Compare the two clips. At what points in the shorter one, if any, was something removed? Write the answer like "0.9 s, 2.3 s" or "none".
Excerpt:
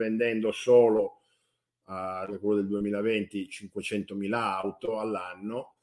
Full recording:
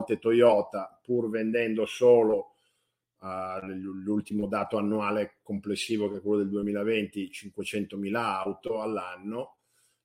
2.3 s